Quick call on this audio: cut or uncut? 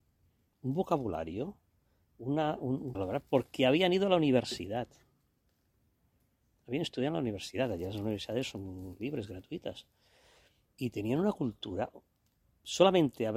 cut